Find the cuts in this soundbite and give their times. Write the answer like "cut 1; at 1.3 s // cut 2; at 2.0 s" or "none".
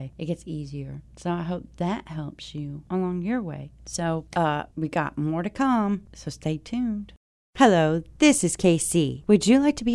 none